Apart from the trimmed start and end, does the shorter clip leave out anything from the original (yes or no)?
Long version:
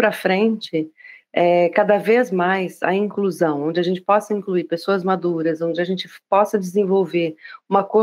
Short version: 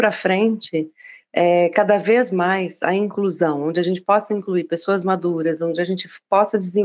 no